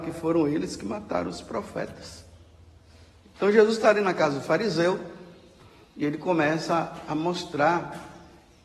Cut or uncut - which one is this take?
cut